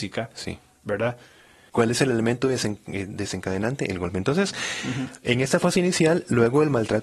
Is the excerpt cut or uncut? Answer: cut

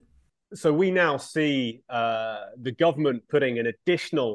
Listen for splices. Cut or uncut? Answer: uncut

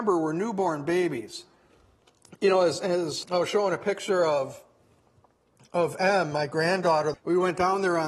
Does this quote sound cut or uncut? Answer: cut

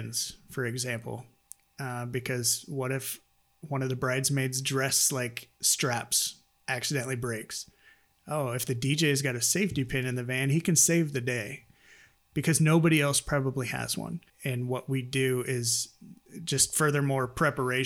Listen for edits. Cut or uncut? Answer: cut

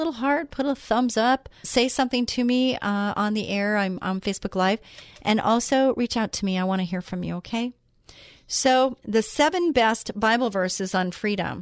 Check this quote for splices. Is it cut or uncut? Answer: uncut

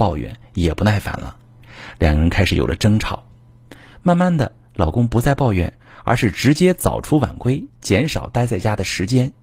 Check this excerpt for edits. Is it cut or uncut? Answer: uncut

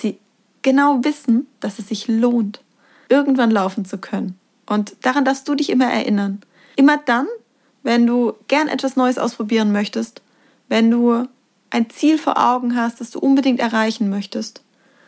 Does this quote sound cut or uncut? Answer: uncut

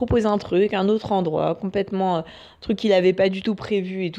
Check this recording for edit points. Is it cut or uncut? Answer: uncut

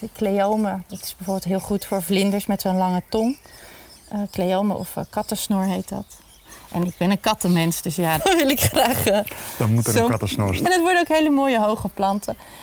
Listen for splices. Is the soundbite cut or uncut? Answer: cut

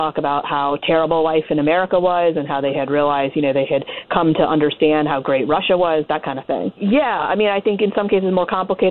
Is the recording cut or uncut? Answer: cut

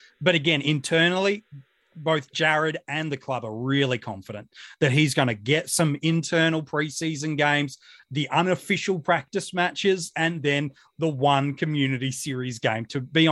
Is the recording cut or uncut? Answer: uncut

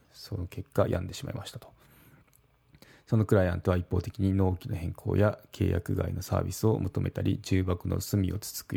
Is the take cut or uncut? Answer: uncut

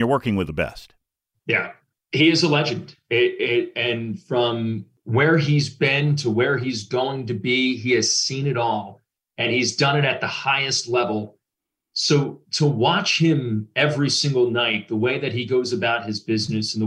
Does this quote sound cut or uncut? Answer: uncut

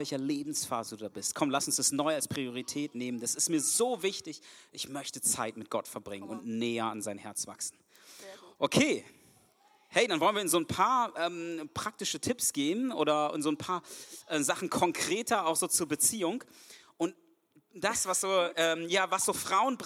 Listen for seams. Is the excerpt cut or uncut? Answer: uncut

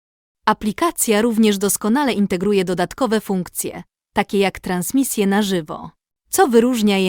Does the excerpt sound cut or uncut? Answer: uncut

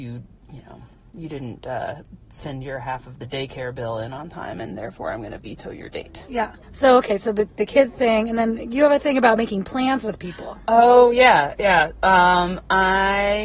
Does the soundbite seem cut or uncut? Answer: cut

